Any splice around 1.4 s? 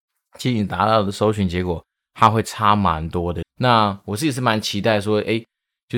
no; 1 cut; at 3.4 s

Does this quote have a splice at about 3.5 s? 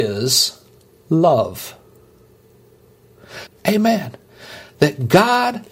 yes; 1 cut; at 3.5 s

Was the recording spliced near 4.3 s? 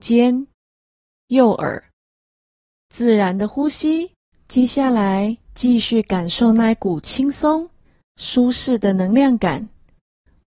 yes; 2 cuts; at 4.3 s, 5.4 s

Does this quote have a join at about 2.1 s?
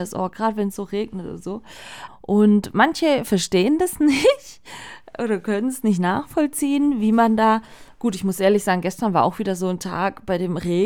yes; 1 cut; at 2.1 s

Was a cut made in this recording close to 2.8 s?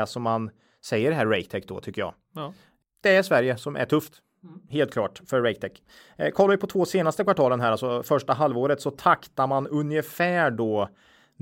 yes; 1 cut; at 2.8 s

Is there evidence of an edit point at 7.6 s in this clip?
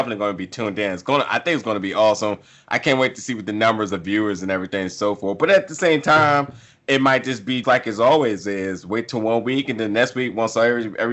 yes; 1 cut; at 7.6 s

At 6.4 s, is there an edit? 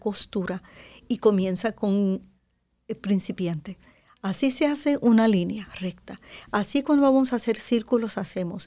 no; 0 cuts

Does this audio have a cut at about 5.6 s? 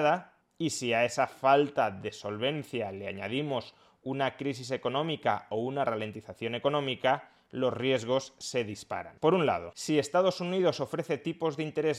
no; 1 cut; at 9.2 s

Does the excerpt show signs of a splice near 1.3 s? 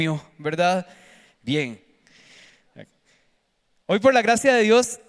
yes; 1 cut; at 1.3 s

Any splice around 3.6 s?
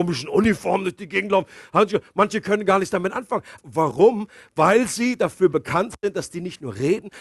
yes; 1 cut; at 3.6 s

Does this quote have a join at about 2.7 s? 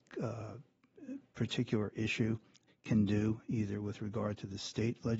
yes; 1 cut; at 2.7 s

